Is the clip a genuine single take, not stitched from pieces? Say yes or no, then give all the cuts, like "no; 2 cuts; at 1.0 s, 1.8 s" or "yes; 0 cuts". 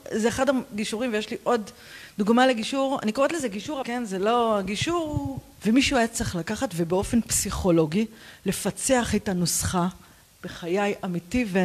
no; 2 cuts; at 3.8 s, 5.6 s